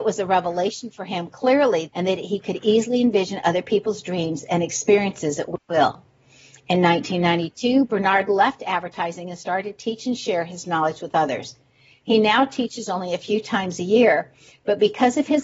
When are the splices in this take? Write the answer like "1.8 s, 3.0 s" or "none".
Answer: 1.9 s